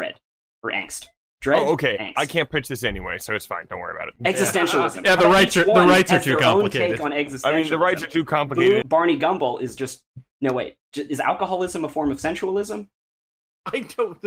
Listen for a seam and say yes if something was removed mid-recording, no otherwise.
yes